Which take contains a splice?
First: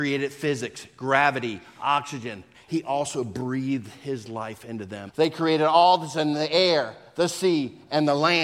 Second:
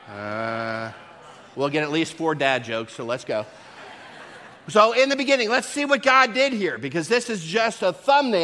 first; 2 cuts; at 2.5 s, 5.1 s

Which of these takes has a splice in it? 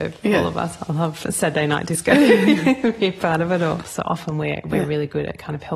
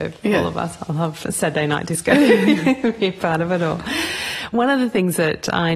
first; 1 cut; at 3.8 s

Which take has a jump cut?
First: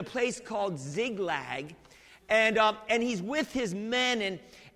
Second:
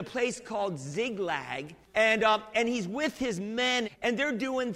second; 2 cuts; at 1.8 s, 3.8 s

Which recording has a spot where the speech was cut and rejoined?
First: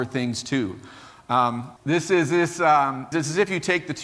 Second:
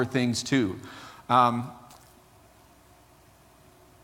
first; 2 cuts; at 1.8 s, 3.1 s

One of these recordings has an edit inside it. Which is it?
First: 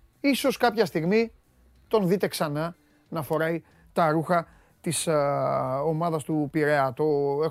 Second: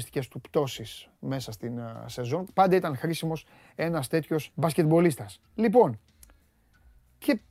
second; 2 cuts; at 2.5 s, 4.5 s

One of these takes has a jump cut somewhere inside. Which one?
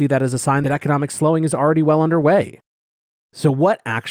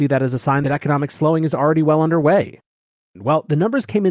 second; 1 cut; at 3.2 s

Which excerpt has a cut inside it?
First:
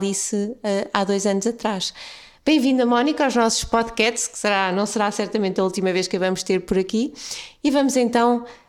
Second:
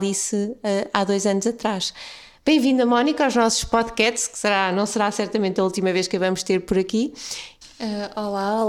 second; 1 cut; at 7.6 s

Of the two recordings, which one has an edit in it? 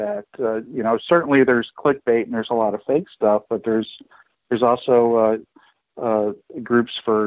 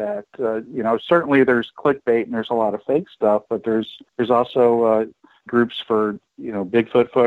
second; 2 cuts; at 4.1 s, 5.5 s

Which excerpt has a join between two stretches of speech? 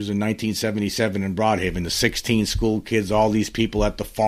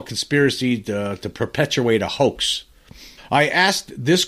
second; 1 cut; at 3.2 s

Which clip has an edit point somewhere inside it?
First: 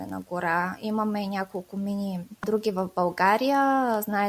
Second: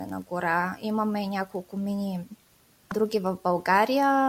first; 1 cut; at 2.4 s

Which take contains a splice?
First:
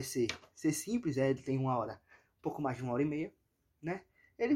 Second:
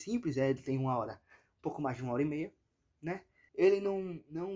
second; 1 cut; at 3.5 s

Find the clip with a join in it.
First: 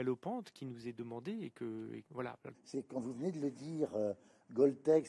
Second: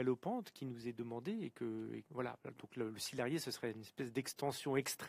first; 1 cut; at 2.5 s

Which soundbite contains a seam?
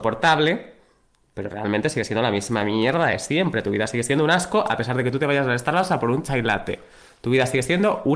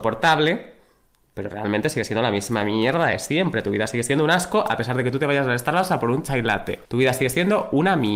second; 1 cut; at 6.8 s

